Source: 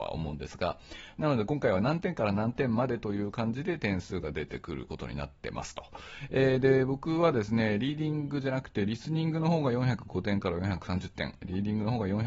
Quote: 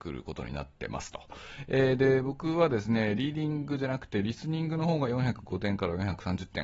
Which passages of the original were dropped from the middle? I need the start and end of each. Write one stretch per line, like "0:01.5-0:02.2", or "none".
none

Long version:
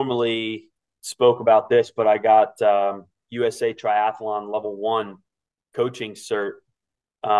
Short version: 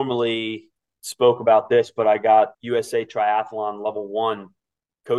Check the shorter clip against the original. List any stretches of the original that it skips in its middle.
0:02.5-0:03.2

